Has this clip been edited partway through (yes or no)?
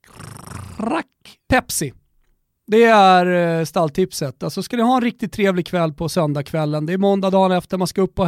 yes